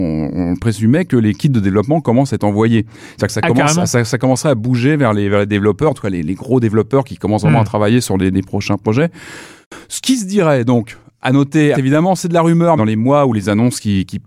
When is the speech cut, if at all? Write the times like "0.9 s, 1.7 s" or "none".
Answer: 11.7 s, 12.8 s